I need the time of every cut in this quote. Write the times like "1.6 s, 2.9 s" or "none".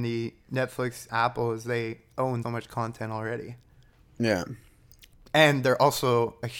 1.1 s, 2.4 s

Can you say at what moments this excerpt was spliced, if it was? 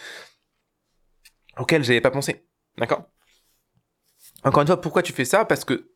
none

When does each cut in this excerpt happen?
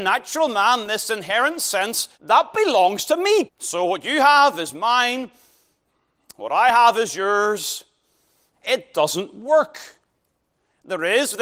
2.1 s, 3.5 s, 8.5 s

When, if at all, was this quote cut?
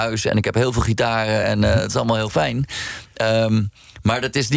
none

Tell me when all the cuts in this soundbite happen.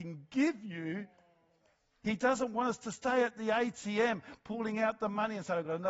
2.0 s

